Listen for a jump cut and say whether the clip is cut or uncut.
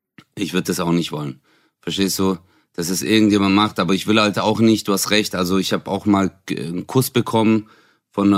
uncut